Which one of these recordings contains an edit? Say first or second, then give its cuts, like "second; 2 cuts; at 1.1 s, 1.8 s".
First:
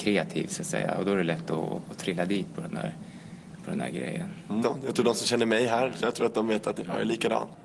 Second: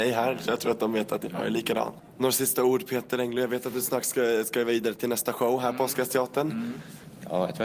first; 1 cut; at 4.6 s